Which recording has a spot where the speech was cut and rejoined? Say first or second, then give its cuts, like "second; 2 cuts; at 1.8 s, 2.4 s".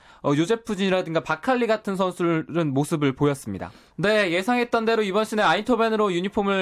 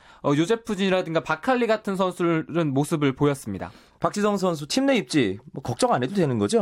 first; 1 cut; at 3.9 s